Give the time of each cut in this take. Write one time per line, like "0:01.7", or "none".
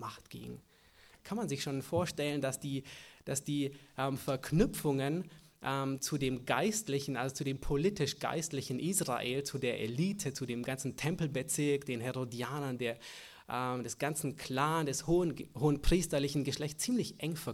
0:01.1